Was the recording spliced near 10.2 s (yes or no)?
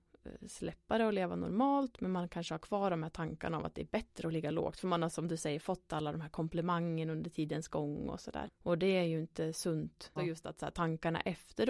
yes